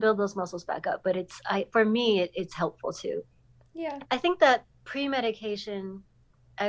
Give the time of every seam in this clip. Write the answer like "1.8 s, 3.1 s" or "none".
4.0 s